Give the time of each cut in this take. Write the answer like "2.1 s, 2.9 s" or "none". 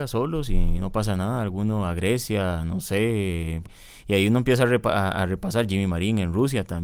3.6 s